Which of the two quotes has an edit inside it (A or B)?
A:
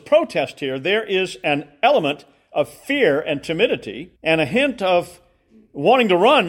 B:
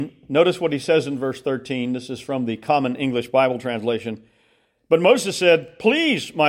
A